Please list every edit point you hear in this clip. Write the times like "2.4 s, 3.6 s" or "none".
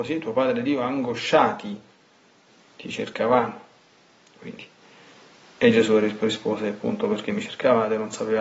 none